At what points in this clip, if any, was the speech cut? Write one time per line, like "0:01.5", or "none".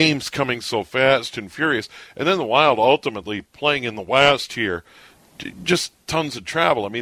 none